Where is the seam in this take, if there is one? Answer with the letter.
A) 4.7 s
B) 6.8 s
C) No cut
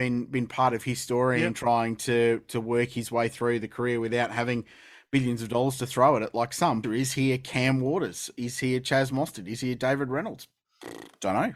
B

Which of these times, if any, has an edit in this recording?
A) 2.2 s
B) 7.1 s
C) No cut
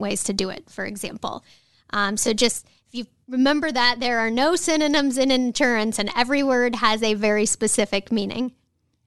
C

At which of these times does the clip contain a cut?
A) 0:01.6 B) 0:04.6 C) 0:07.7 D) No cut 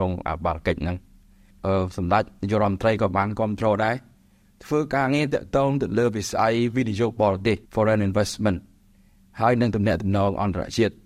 C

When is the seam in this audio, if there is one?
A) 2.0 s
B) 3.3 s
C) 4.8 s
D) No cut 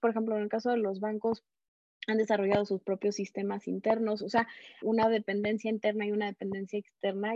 C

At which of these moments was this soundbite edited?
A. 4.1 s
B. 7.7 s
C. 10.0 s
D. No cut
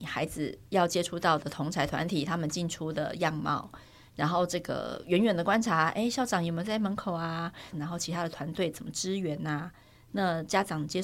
B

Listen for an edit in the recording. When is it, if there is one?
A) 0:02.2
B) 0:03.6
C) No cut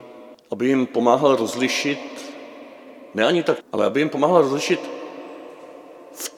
B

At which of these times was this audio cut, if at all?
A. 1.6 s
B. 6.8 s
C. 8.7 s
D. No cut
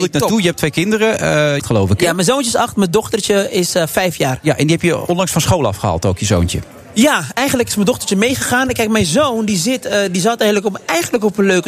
A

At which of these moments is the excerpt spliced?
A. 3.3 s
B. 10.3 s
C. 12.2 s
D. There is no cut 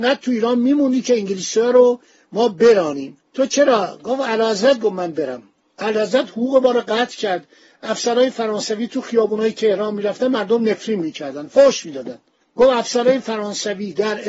A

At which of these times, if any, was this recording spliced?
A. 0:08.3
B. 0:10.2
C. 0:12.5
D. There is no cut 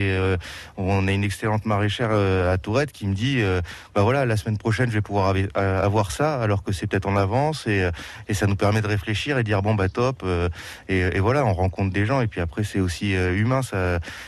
D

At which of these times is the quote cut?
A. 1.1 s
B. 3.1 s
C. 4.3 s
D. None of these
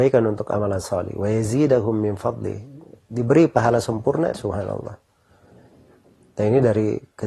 C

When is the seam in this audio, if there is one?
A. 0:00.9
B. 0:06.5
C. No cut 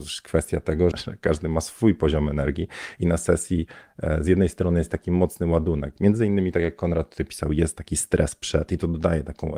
A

